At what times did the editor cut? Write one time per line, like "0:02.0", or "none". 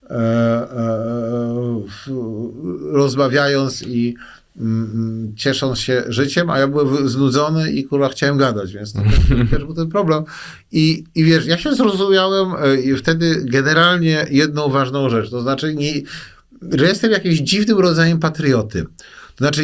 none